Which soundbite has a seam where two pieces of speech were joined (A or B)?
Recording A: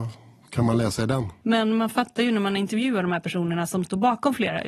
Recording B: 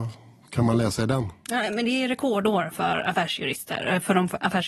A